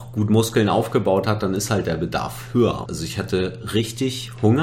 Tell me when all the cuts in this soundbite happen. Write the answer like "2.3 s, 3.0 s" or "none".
2.9 s